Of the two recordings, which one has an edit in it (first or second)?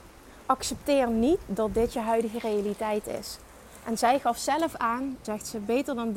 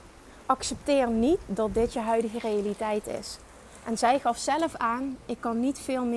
first